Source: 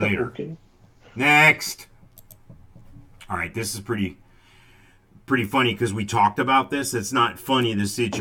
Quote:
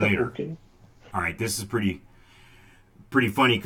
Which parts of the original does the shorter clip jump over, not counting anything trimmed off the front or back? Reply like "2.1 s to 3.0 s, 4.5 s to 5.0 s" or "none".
1.1 s to 3.3 s